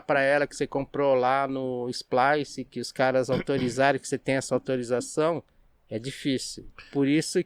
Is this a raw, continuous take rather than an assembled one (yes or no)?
yes